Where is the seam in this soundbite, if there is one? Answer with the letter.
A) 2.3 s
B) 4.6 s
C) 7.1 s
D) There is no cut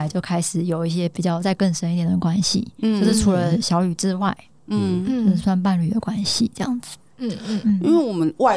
B